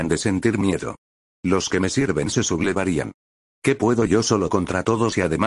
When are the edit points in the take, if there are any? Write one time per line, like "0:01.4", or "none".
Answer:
none